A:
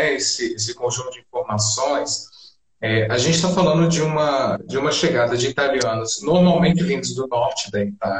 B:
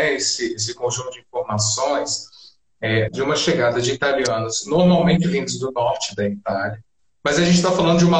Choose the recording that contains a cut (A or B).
B